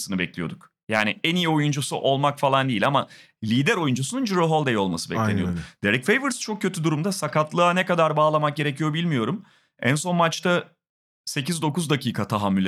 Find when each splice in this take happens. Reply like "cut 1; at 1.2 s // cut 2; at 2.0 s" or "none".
none